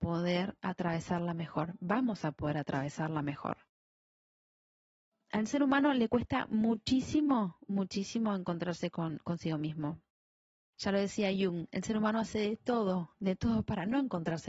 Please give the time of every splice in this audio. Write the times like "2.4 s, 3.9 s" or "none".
none